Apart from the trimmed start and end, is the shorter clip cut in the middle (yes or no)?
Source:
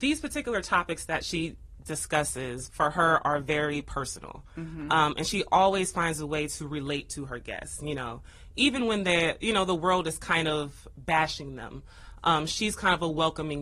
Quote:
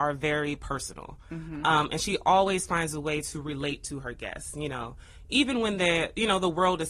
no